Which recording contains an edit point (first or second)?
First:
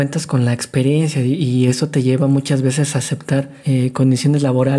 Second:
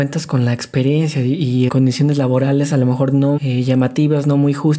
second